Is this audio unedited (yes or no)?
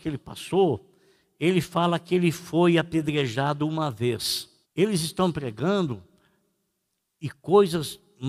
no